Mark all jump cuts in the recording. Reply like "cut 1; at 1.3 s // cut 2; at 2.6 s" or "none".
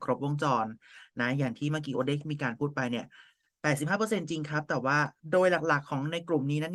cut 1; at 5.2 s